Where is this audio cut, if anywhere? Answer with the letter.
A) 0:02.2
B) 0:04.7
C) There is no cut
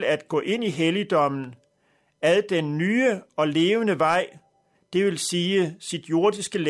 B